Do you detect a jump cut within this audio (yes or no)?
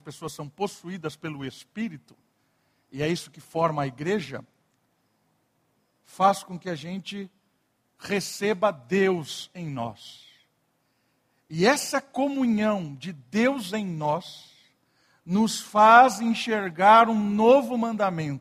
no